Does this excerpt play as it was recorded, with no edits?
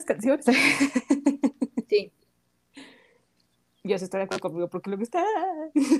yes; 0 cuts

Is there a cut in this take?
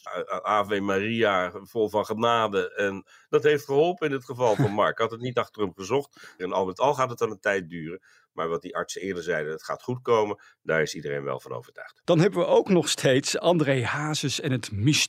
yes; 2 cuts; at 6.4 s, 12.0 s

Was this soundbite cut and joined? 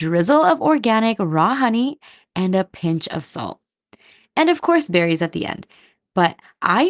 no; 0 cuts

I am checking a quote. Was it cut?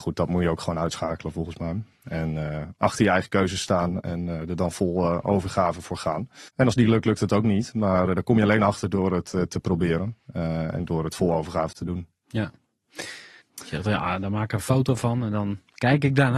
yes; 2 cuts; at 6.5 s, 13.4 s

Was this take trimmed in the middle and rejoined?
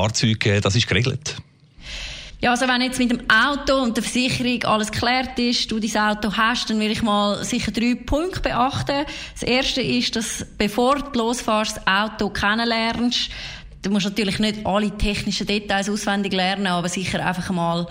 no; 0 cuts

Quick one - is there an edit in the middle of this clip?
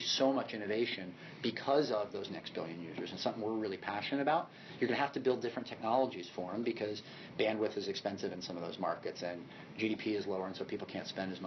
no; 0 cuts

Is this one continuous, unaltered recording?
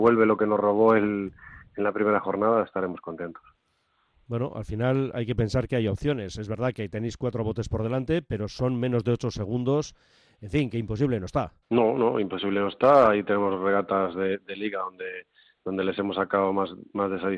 no; 1 cut; at 11.6 s

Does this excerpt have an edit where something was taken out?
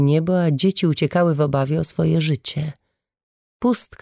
no; 0 cuts

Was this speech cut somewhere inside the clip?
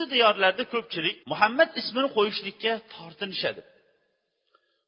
yes; 1 cut; at 1.2 s

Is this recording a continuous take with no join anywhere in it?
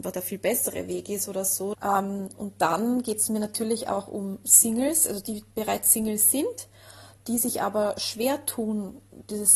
no; 1 cut; at 1.7 s

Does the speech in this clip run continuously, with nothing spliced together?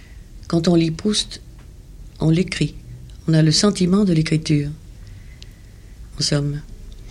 no; 1 cut; at 6.1 s

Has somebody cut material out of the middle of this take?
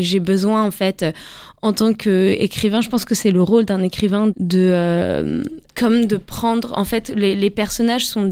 yes; 2 cuts; at 4.3 s, 5.7 s

